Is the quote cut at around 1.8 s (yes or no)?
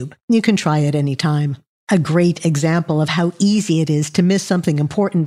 yes